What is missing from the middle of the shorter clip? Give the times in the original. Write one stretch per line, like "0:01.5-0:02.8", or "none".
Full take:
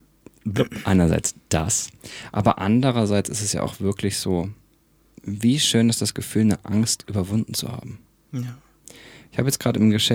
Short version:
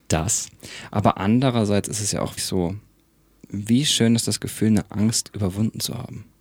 0:03.8-0:04.1